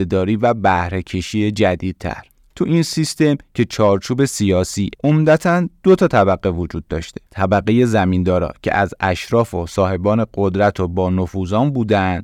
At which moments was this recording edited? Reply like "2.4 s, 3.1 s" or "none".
4.9 s

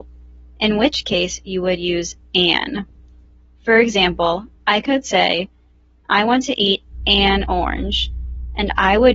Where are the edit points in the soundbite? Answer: none

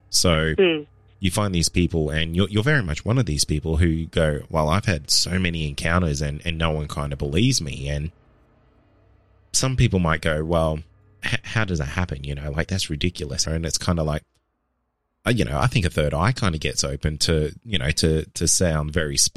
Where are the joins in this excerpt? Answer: 13.5 s

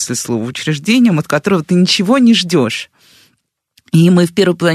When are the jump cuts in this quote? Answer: none

